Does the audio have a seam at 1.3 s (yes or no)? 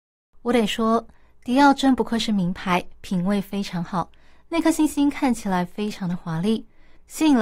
no